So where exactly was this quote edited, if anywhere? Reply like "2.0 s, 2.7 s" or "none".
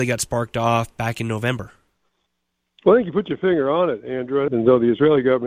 4.5 s